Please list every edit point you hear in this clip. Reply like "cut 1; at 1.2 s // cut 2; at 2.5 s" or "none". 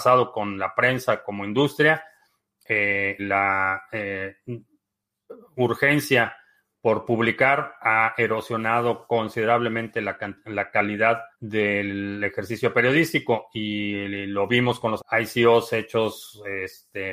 cut 1; at 3.2 s // cut 2; at 11.3 s // cut 3; at 15.0 s